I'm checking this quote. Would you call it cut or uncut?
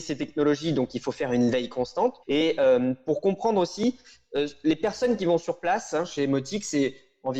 cut